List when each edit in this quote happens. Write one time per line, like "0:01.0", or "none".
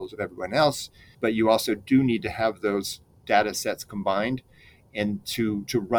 0:01.1